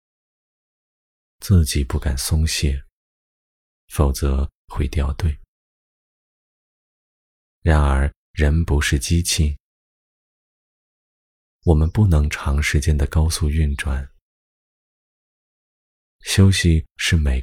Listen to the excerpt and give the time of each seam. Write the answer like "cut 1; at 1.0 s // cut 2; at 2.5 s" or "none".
cut 1; at 1.2 s